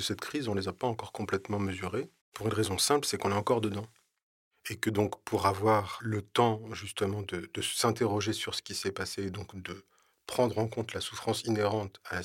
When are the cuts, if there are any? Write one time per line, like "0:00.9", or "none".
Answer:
0:02.2